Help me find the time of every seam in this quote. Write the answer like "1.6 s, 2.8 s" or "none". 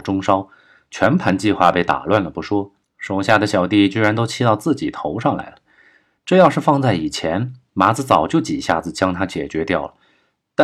none